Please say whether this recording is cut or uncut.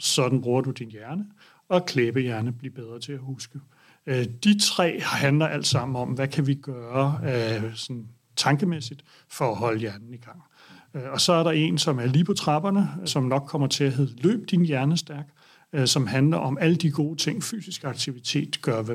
cut